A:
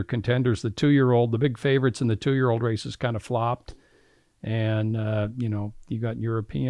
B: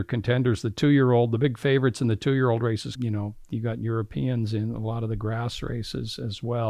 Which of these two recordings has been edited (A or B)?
B